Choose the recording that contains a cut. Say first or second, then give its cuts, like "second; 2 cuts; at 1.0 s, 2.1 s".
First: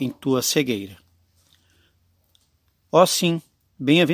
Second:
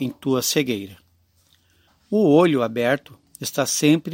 second; 1 cut; at 1.9 s